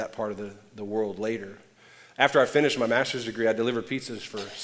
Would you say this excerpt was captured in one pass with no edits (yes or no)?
yes